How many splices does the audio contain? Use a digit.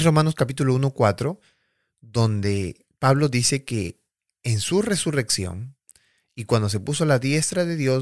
0